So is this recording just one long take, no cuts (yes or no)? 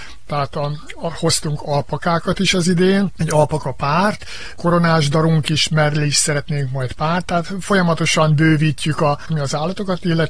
no